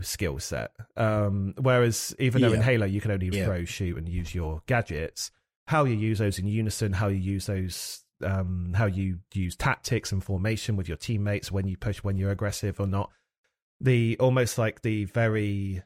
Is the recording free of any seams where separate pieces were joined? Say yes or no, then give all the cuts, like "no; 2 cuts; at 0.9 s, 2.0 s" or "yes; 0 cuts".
no; 1 cut; at 3.3 s